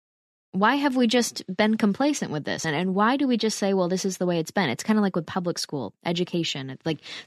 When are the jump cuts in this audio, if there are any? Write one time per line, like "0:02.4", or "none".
none